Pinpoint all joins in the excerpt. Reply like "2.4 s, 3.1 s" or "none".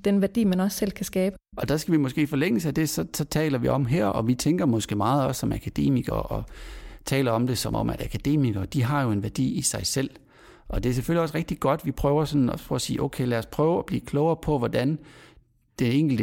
none